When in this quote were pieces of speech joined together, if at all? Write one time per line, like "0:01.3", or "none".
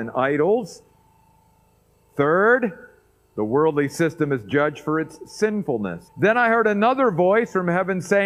0:06.1